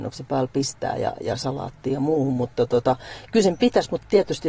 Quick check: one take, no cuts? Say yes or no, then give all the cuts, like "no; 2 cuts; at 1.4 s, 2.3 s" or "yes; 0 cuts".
yes; 0 cuts